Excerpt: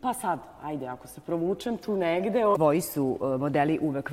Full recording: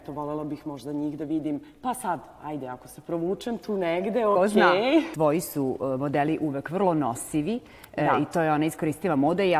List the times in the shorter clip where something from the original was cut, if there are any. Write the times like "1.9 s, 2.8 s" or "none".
2.5 s

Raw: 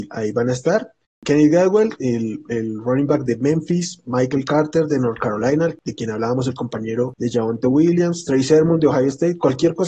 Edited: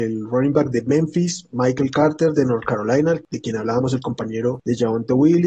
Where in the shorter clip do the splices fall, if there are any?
none

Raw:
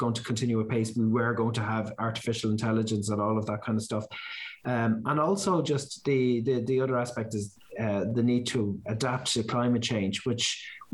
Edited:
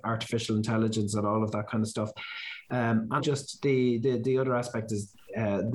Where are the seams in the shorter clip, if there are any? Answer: 3.2 s

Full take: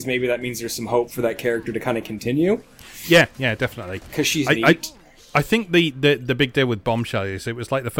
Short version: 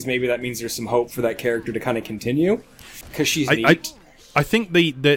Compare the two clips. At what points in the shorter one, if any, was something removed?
3.0 s

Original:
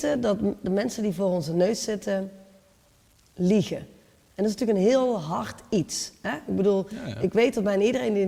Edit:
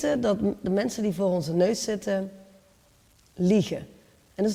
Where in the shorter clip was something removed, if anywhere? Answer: none

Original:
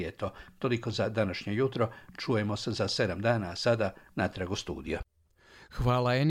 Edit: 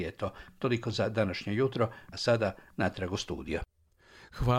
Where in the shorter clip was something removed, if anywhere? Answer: 2.1 s

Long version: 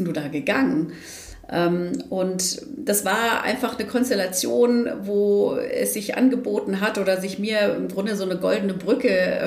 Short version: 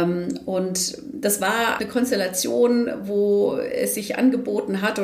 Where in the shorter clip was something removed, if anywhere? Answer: 1.8 s

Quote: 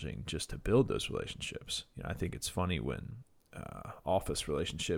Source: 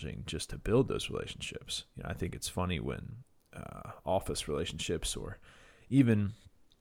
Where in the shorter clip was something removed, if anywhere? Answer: none

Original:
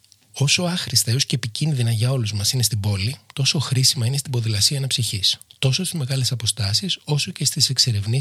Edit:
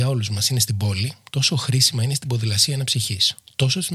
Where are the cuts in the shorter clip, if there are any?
none

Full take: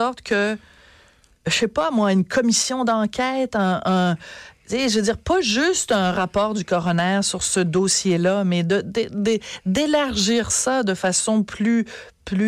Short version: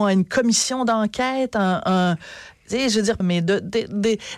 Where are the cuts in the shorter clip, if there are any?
3.2 s

